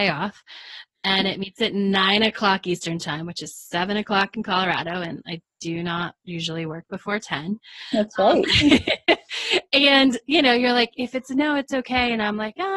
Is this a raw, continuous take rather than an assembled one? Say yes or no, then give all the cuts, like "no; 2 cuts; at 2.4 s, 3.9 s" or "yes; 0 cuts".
yes; 0 cuts